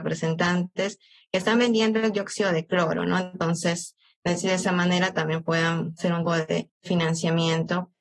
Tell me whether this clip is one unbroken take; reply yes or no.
no